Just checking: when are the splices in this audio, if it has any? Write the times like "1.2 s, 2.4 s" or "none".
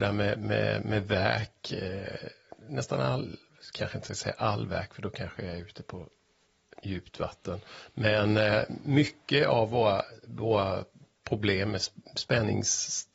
none

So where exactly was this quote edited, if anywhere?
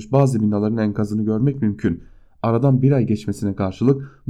none

